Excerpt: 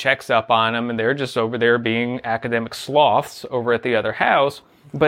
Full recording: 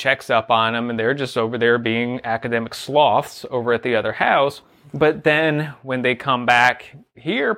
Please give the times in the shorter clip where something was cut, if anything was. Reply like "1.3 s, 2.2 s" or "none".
none

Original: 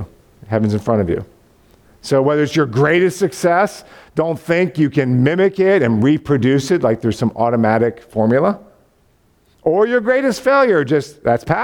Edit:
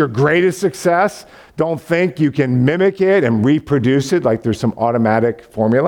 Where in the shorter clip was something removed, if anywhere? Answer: none

